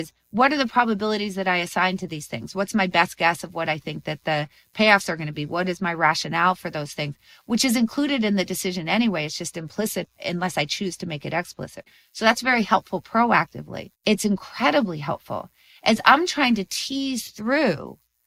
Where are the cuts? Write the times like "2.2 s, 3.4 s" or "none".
13.9 s